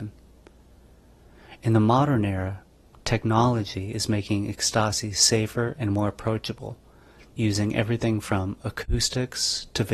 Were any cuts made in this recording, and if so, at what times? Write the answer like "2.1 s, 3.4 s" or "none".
none